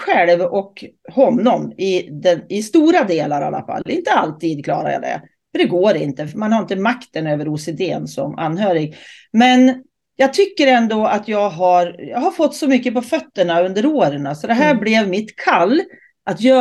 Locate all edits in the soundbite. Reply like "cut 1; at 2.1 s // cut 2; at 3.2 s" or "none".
none